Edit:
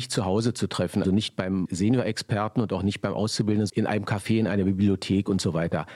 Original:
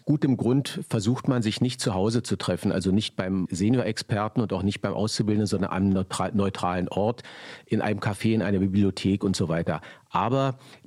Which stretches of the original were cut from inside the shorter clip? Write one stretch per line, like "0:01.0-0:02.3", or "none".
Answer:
0:02.7-0:02.8
0:05.5-0:07.6